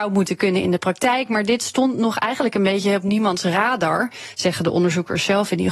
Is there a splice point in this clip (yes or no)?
no